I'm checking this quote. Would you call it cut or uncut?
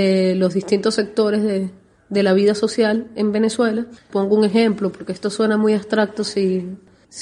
cut